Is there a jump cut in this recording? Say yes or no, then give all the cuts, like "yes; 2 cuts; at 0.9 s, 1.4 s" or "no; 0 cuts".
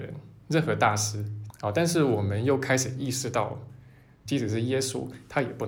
yes; 2 cuts; at 1.5 s, 4.3 s